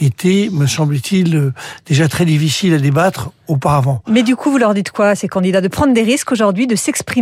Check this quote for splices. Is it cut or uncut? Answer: uncut